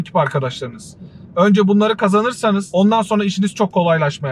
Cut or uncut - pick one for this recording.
uncut